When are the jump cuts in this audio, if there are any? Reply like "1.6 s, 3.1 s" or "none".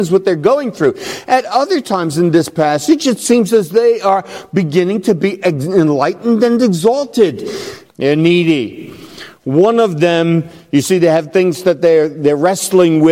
7.8 s